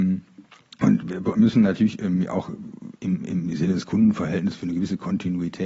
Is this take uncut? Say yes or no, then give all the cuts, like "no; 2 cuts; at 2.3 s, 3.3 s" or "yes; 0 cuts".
yes; 0 cuts